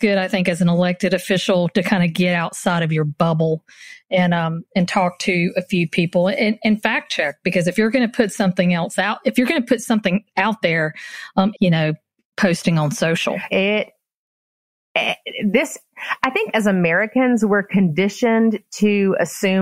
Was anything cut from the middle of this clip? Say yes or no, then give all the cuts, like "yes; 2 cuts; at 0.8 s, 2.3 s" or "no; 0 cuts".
yes; 2 cuts; at 11.5 s, 13.5 s